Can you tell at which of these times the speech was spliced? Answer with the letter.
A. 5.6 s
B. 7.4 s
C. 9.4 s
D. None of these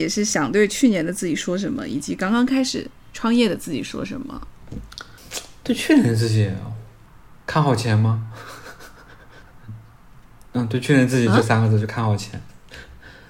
B